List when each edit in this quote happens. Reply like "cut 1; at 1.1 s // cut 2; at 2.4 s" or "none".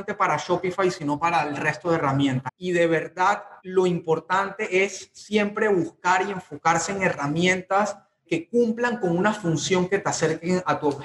cut 1; at 2.5 s // cut 2; at 3.6 s